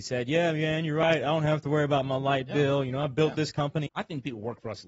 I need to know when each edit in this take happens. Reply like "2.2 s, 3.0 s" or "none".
3.9 s